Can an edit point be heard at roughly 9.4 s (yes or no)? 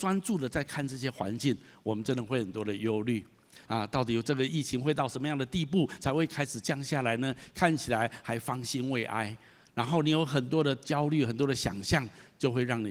no